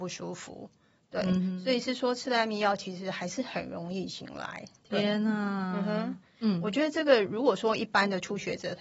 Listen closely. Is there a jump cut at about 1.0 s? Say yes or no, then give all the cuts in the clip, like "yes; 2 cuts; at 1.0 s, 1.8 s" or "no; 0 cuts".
no; 1 cut; at 6.3 s